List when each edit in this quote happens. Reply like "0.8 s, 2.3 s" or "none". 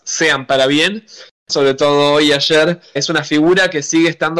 1.5 s, 3.0 s